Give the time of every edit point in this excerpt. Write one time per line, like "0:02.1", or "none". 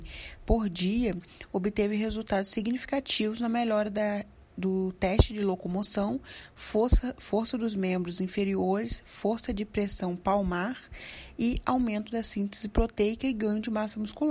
none